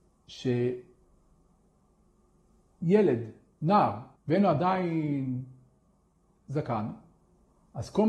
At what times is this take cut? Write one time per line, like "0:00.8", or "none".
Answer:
0:04.1